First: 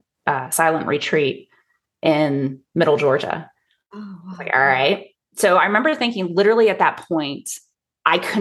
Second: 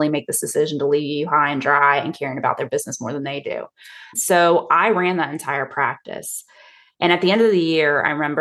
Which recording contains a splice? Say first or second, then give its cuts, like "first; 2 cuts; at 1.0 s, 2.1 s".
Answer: second; 1 cut; at 4.1 s